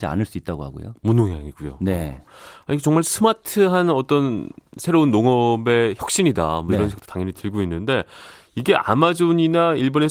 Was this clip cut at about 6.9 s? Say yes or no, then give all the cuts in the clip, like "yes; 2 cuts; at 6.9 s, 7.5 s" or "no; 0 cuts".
no; 0 cuts